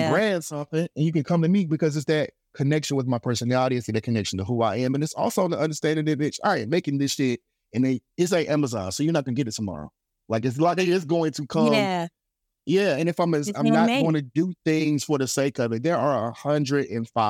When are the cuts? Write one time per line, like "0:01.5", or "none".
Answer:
none